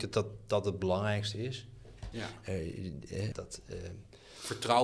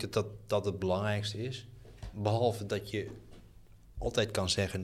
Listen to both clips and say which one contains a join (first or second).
first